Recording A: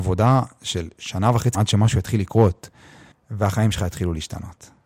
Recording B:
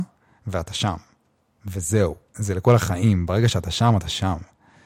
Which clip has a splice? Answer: A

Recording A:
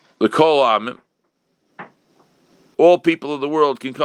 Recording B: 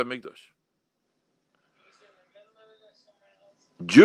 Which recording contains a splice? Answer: A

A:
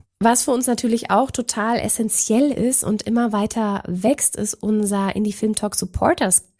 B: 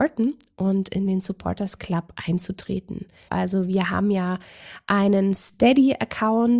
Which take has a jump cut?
B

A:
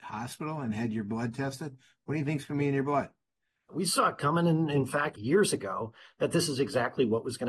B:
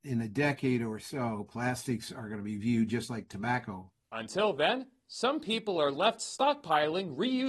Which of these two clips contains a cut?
A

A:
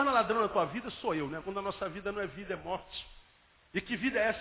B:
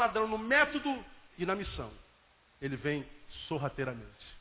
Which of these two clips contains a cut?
A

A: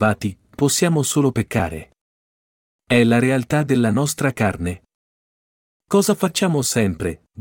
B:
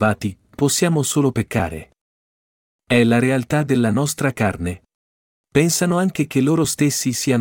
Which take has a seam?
B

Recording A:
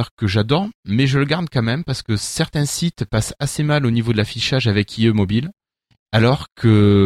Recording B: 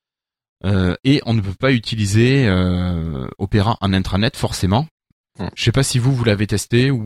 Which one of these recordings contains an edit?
B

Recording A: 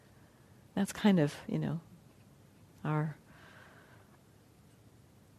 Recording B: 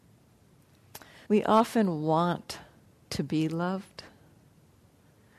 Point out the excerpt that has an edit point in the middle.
B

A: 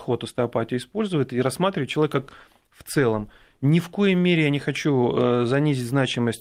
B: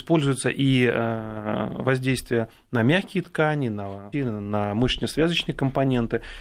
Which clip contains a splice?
B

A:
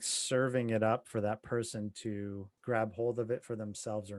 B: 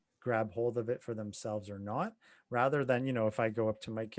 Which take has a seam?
A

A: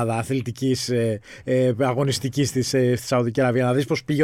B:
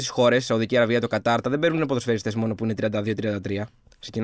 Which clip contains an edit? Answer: B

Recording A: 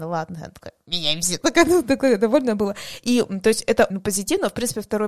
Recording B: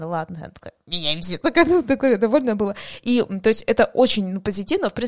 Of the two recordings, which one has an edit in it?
A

